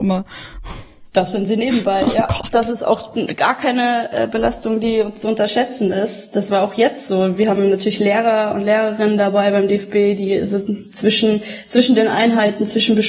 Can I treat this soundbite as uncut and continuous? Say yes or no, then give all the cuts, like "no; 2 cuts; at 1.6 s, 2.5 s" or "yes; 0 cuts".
yes; 0 cuts